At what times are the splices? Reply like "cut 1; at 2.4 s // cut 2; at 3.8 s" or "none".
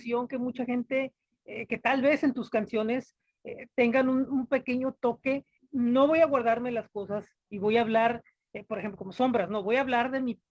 cut 1; at 4.3 s // cut 2; at 5.6 s